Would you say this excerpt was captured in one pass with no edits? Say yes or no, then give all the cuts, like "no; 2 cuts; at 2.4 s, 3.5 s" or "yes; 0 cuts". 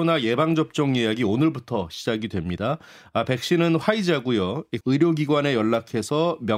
no; 1 cut; at 4.8 s